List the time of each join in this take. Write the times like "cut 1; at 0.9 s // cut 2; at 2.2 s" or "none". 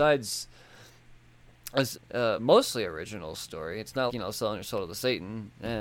cut 1; at 1.9 s // cut 2; at 4.1 s